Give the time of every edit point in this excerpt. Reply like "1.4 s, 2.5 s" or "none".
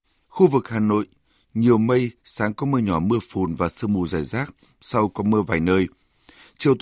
none